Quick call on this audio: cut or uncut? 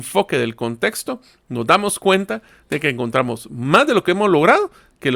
uncut